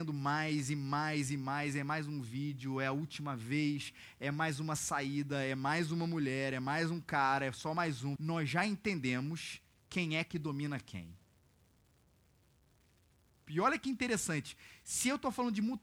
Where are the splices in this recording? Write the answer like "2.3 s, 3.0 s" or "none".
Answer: 8.2 s, 13.5 s